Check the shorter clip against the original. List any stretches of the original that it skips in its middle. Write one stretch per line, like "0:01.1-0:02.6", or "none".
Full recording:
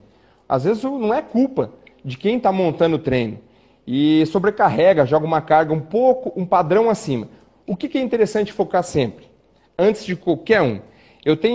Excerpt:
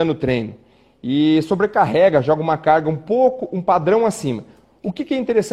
none